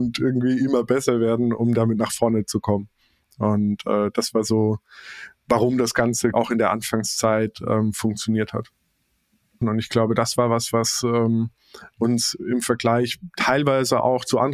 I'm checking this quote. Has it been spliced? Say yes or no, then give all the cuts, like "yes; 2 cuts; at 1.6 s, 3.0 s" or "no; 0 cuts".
yes; 2 cuts; at 6.3 s, 9.6 s